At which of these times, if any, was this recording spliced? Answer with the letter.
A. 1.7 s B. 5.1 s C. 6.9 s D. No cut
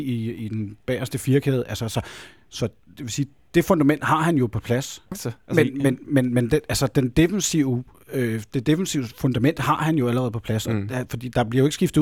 B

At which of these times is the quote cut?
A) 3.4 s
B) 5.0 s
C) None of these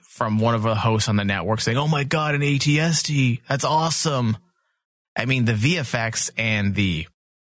B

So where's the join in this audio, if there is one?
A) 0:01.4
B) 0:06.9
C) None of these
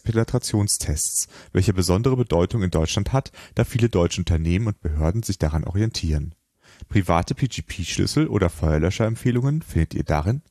C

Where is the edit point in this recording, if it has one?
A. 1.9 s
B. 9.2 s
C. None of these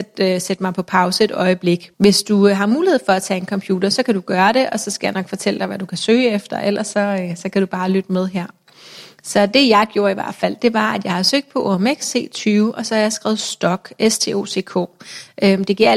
A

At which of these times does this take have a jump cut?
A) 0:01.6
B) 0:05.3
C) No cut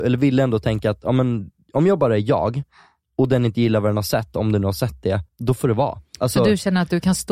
B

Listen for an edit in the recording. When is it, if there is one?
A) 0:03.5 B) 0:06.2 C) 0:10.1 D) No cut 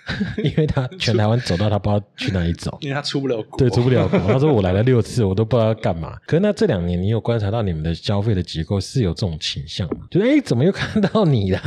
D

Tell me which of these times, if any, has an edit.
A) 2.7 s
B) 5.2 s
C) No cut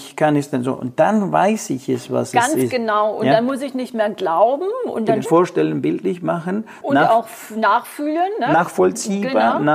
B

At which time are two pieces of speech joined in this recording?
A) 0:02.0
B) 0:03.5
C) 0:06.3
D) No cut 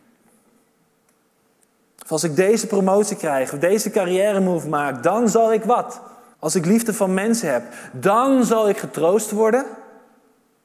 C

